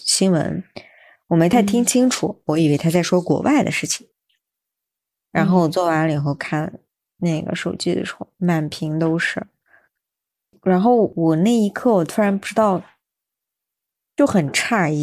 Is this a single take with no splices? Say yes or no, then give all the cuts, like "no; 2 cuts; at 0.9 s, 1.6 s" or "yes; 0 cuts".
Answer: yes; 0 cuts